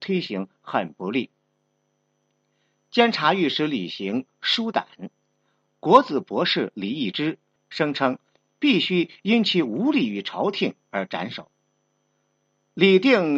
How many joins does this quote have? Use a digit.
1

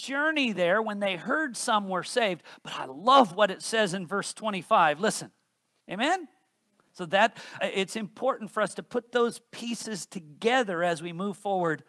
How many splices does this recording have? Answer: 2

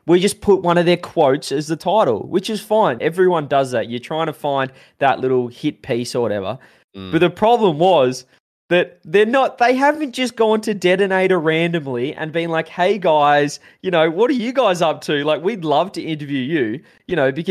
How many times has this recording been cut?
1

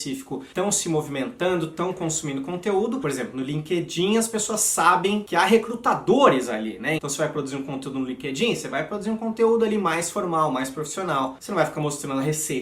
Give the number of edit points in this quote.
1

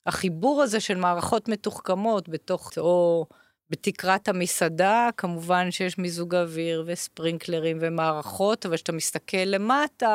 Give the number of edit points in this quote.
1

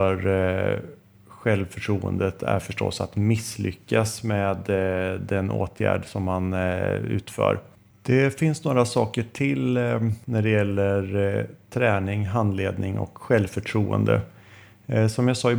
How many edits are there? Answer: 1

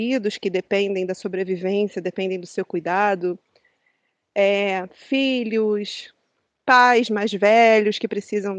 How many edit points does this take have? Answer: 0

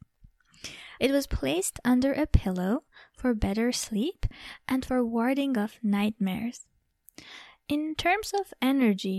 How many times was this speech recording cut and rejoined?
2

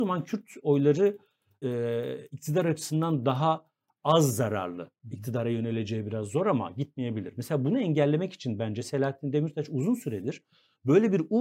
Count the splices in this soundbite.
1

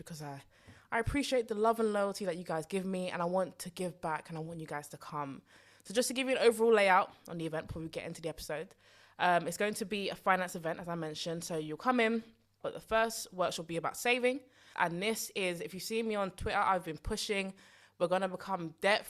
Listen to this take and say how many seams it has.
2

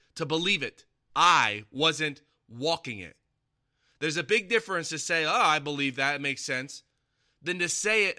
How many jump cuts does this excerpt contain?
1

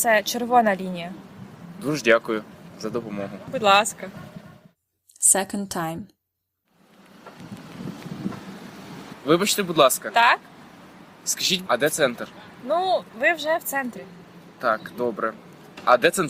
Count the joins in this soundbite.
1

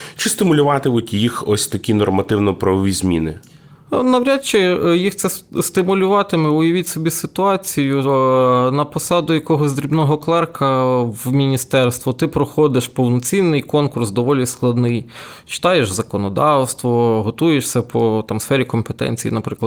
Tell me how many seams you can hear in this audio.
0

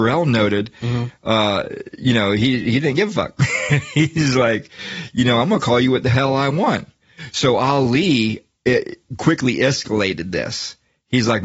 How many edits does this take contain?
0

